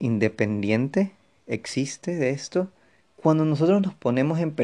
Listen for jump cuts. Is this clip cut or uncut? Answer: cut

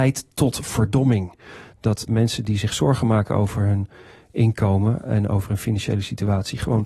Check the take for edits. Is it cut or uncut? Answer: cut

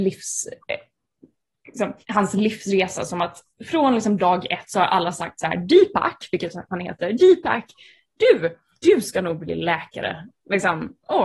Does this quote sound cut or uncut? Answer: cut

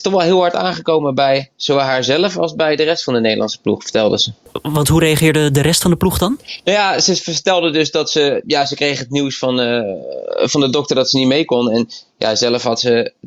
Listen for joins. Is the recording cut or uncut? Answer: uncut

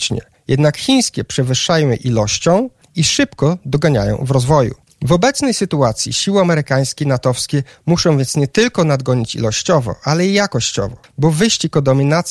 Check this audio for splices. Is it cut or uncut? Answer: uncut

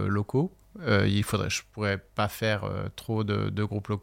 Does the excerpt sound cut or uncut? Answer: uncut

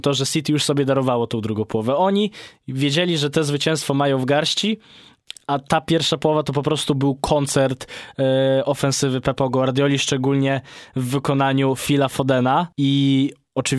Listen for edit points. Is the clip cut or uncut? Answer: cut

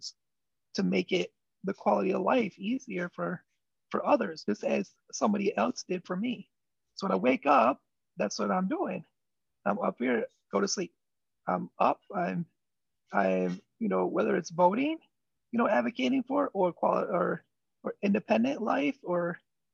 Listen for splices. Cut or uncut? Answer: uncut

